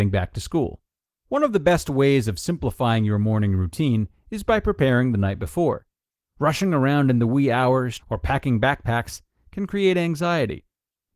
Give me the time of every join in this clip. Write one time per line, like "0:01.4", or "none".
0:01.2
0:08.0